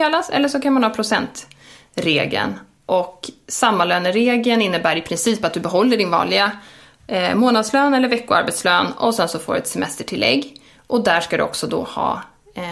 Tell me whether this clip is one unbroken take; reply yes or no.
yes